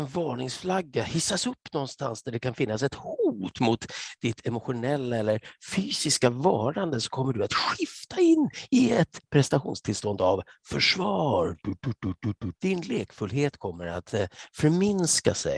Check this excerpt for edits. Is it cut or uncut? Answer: cut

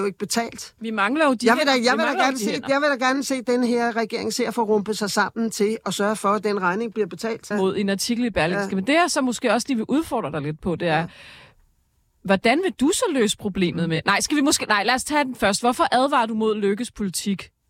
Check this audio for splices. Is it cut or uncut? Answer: cut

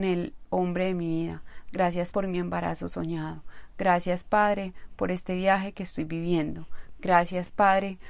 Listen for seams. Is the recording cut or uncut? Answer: cut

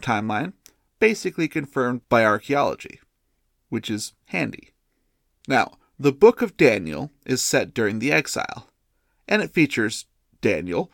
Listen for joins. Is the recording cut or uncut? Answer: cut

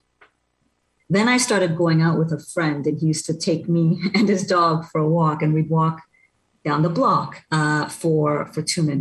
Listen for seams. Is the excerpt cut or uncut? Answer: cut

